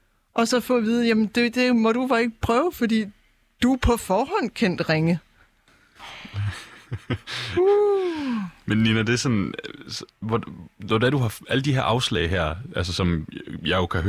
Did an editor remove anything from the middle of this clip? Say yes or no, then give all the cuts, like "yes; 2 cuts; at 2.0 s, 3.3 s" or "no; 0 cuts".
no; 0 cuts